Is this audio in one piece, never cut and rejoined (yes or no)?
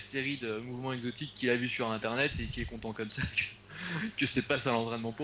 yes